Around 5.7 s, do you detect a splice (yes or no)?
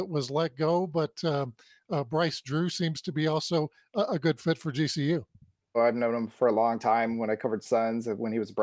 yes